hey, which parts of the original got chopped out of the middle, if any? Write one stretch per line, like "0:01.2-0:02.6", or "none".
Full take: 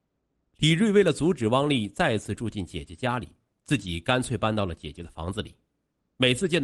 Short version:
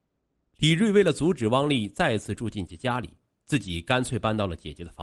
0:02.7-0:02.9